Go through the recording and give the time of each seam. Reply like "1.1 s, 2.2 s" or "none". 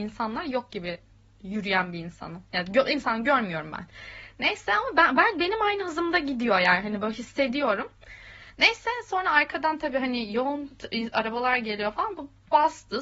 none